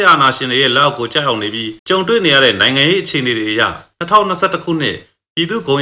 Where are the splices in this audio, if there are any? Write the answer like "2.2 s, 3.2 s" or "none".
1.8 s